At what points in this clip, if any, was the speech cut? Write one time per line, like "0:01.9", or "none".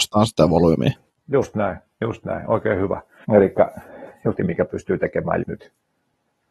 0:03.2
0:04.4
0:05.4